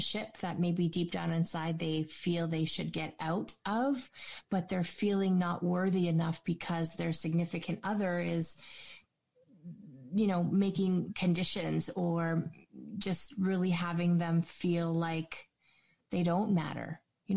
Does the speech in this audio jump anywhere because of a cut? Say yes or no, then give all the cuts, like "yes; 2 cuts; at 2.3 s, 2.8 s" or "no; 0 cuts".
no; 0 cuts